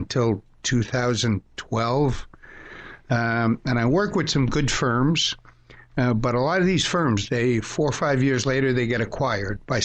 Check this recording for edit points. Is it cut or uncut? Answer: uncut